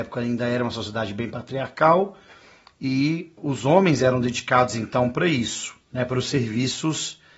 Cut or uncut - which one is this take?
cut